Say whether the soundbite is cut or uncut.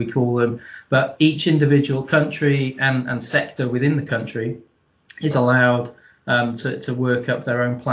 uncut